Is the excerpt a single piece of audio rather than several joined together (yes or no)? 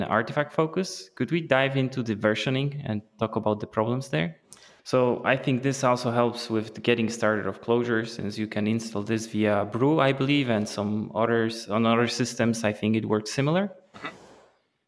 no